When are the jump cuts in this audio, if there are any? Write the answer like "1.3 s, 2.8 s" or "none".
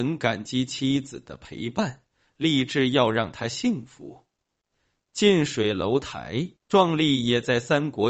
6.6 s

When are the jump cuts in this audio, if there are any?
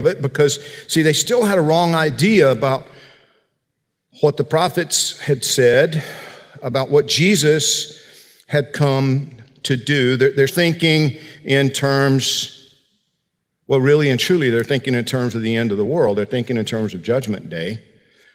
10.5 s

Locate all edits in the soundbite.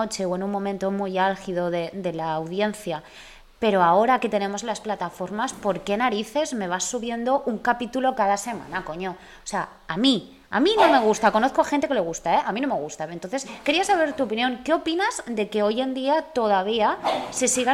none

